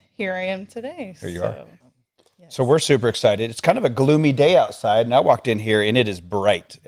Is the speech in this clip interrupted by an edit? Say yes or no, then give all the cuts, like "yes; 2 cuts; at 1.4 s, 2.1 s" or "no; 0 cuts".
yes; 1 cut; at 1.8 s